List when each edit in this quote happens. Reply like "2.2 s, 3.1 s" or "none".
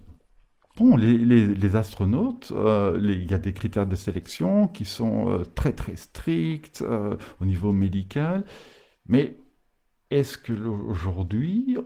none